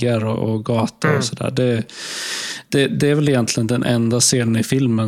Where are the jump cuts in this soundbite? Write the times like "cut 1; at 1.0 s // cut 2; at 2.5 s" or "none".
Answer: cut 1; at 2.9 s